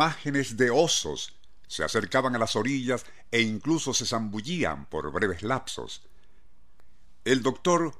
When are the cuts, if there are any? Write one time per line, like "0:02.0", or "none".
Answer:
0:01.7

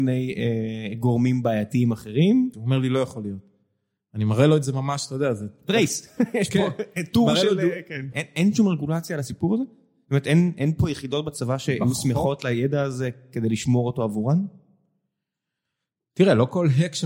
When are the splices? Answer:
0:02.5
0:08.1

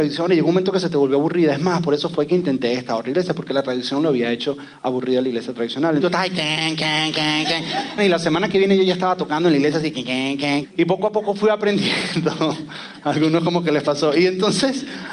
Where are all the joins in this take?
0:06.0
0:08.0
0:10.6

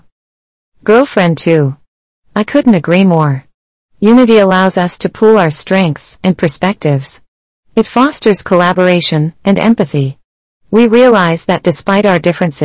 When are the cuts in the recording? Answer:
0:06.2
0:09.4

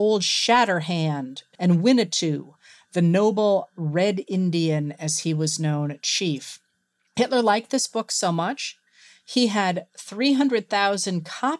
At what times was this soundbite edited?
0:01.5

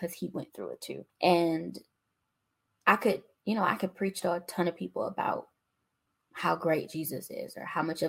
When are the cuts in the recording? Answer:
0:01.1

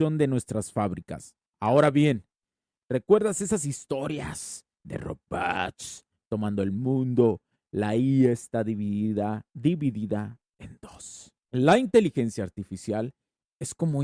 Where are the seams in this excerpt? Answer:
0:11.4

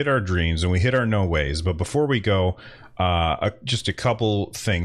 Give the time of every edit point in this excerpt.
none

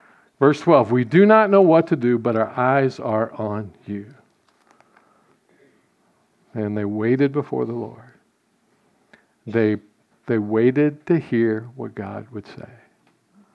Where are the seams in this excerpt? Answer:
0:10.1

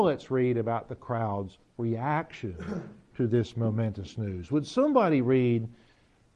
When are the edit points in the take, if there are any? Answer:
none

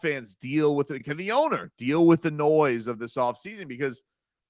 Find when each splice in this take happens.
none

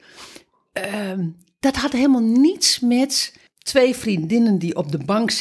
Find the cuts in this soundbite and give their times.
none

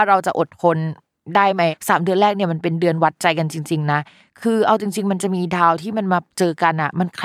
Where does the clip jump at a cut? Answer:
0:06.3

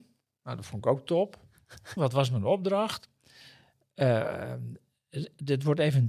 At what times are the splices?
0:02.0

